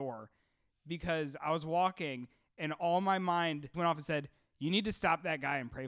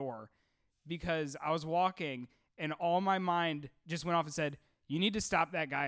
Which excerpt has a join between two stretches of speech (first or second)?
first